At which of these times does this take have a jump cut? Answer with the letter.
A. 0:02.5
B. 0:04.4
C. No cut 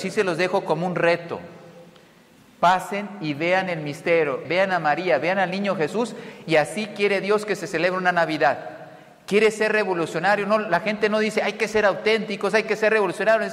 B